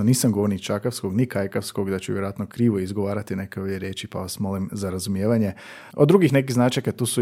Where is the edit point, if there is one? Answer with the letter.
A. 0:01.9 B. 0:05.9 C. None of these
B